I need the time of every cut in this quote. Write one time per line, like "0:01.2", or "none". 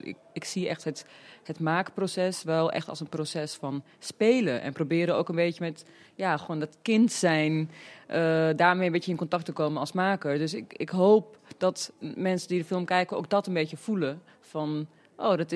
none